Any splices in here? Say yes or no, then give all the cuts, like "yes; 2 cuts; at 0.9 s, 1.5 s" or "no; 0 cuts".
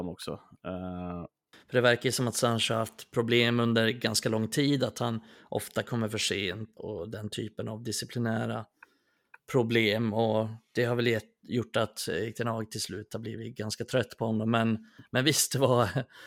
yes; 2 cuts; at 1.5 s, 6.8 s